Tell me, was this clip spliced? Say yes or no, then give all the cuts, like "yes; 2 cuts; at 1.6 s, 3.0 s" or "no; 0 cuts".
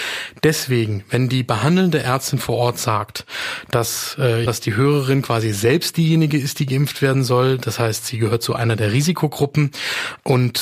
yes; 1 cut; at 4.5 s